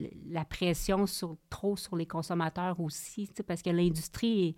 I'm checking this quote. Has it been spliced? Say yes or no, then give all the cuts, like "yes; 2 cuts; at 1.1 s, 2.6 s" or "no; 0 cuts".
no; 0 cuts